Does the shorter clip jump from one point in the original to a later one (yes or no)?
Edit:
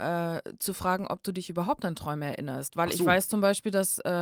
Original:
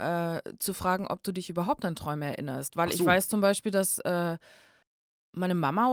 no